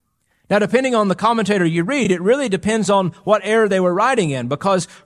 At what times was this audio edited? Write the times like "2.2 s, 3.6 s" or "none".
none